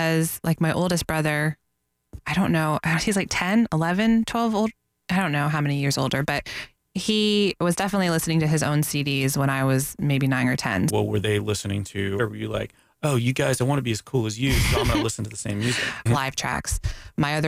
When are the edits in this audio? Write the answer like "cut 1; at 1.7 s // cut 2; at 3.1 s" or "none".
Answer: cut 1; at 10.9 s // cut 2; at 12.2 s // cut 3; at 16.1 s